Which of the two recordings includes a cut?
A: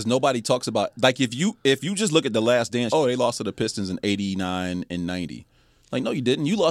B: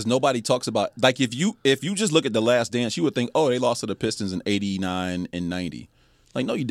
A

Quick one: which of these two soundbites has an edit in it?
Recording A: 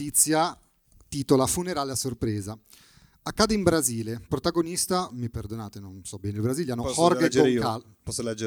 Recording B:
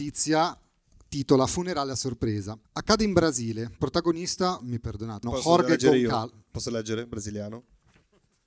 B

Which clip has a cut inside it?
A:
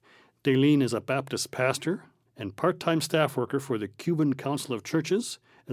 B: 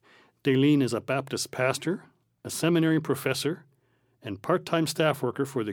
A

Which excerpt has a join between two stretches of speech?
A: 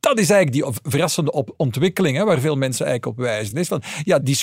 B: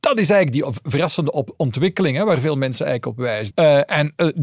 B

